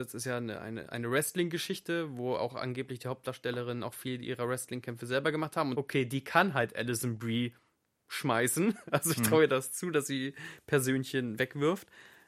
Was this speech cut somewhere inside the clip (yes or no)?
yes